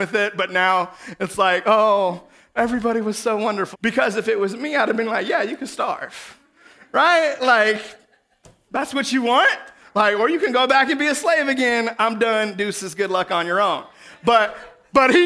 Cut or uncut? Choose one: cut